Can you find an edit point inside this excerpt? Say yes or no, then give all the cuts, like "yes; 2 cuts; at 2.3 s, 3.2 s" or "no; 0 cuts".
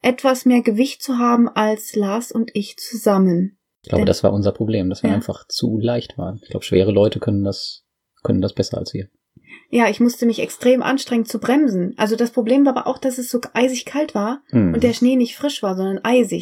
no; 0 cuts